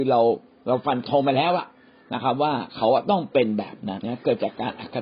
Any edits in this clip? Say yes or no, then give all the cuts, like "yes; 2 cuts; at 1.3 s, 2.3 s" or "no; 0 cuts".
yes; 1 cut; at 4.0 s